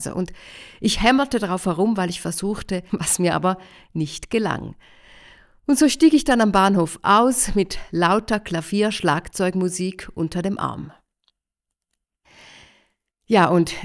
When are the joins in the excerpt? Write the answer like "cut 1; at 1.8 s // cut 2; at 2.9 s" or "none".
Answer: cut 1; at 2.9 s